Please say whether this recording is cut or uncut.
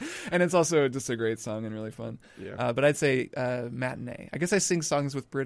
uncut